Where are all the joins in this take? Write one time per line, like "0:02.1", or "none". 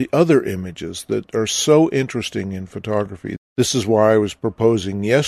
none

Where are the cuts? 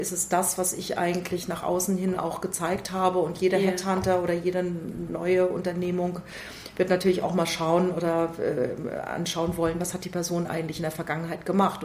none

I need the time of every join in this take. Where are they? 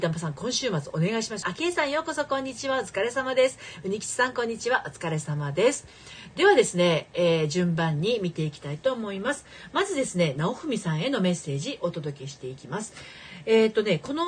0:01.4

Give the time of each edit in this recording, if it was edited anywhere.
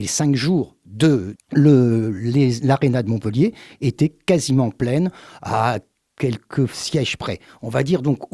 0:01.4

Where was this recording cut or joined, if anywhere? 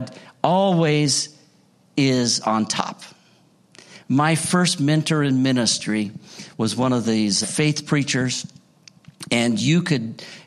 0:07.4

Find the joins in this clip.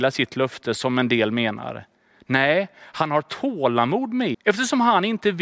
0:04.3

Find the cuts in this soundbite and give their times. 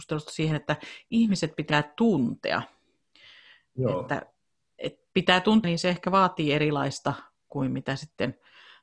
0:05.6

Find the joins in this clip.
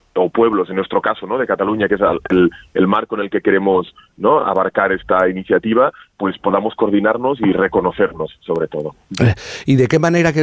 none

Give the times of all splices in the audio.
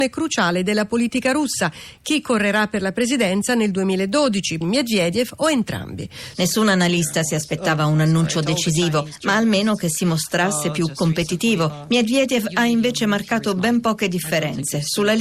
0:04.6
0:06.3

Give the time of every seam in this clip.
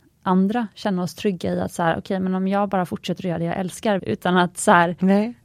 0:04.0

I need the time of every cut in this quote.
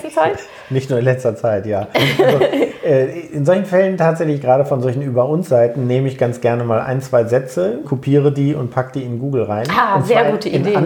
0:07.8

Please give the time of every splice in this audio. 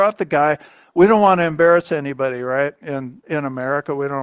none

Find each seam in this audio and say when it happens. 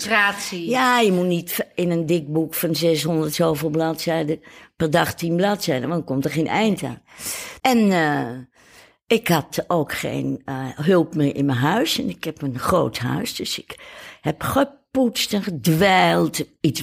0:07.6

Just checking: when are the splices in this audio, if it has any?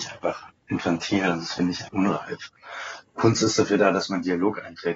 0:01.9

